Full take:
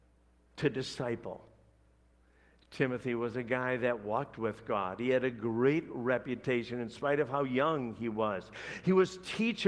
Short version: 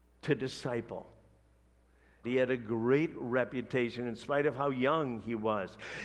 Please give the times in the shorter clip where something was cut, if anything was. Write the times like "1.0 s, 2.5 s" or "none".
2.2 s